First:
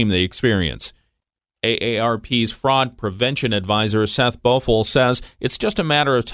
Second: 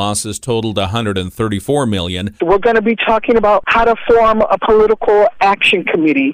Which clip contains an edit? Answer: second; 1 cut; at 2.4 s

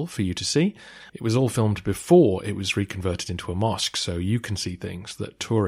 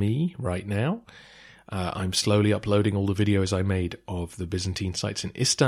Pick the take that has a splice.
first; 1 cut; at 1.1 s

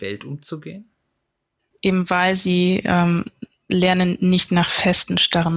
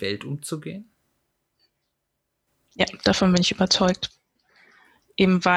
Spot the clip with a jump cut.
first; 1 cut; at 1.7 s

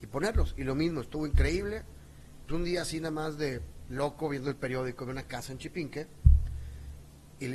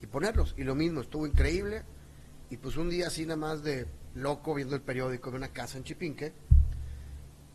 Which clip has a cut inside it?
first; 1 cut; at 2.5 s

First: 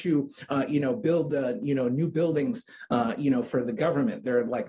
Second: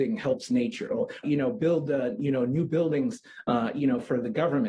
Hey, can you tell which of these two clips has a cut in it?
second; 1 cut; at 1.2 s

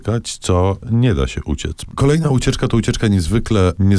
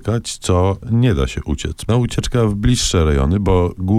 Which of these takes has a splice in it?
second; 1 cut; at 1.9 s

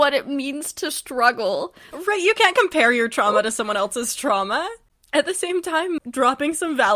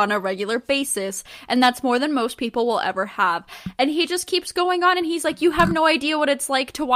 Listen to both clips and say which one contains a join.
first; 1 cut; at 6.0 s

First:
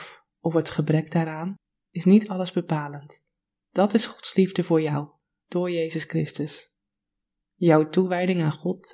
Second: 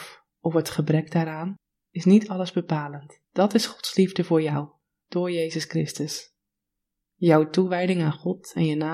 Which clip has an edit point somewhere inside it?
second; 1 cut; at 3.2 s

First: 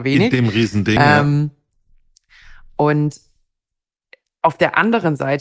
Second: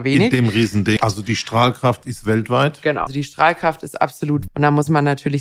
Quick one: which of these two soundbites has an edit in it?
second; 3 cuts; at 1.0 s, 3.1 s, 4.5 s

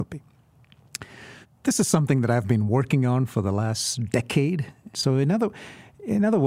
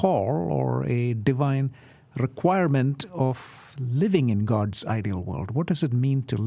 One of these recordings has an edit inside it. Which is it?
first; 2 cuts; at 1.4 s, 4.9 s

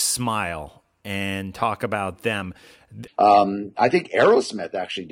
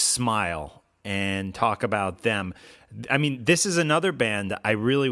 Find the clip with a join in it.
first; 1 cut; at 3.1 s

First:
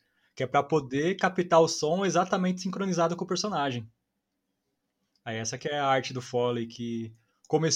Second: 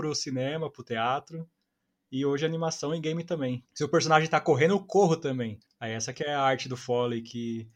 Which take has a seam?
second; 2 cuts; at 3.7 s, 5.7 s

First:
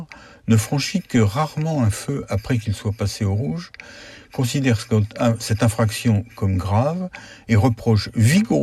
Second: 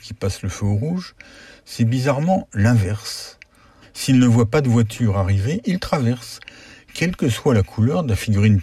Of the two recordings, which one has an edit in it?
second; 1 cut; at 3.8 s

